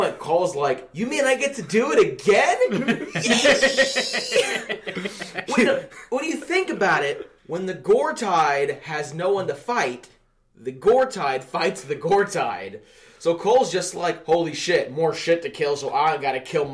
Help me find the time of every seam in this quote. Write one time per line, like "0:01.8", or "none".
0:07.4